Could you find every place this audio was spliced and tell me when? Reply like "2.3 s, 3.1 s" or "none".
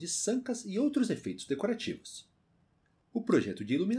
none